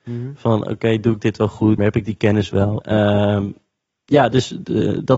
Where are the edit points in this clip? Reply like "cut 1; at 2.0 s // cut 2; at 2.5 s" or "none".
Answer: cut 1; at 1.8 s // cut 2; at 2.8 s